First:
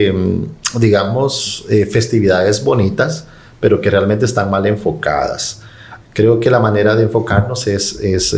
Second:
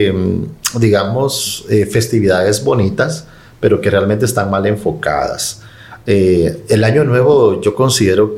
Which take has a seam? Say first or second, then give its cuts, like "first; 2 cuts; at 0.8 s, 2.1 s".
first; 1 cut; at 6.0 s